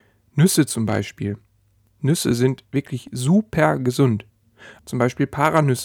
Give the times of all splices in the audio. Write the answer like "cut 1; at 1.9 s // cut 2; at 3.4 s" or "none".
cut 1; at 4.8 s